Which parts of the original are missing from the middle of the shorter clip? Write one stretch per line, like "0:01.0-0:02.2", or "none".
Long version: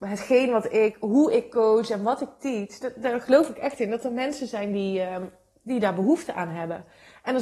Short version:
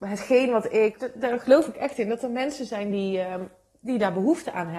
0:01.0-0:02.8